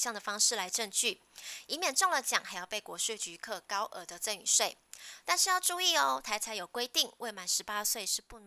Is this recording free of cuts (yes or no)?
yes